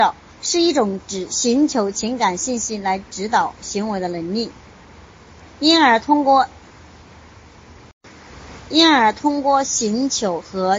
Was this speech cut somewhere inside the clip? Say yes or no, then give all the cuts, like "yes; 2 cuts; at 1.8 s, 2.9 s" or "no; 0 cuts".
no; 0 cuts